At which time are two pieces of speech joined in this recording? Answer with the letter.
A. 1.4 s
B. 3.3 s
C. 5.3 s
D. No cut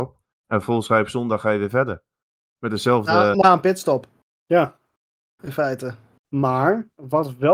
B